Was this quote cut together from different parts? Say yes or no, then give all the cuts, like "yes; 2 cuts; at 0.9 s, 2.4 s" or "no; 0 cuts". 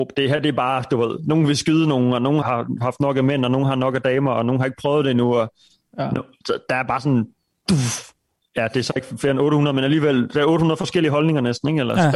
yes; 1 cut; at 2.4 s